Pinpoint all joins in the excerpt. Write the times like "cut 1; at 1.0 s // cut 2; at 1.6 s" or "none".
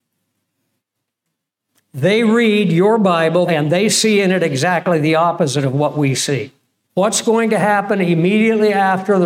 cut 1; at 3.5 s // cut 2; at 6.8 s